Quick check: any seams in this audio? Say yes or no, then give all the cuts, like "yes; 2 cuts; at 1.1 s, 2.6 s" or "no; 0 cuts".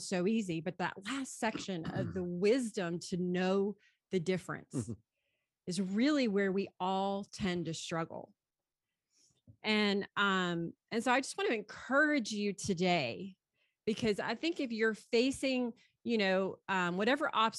no; 0 cuts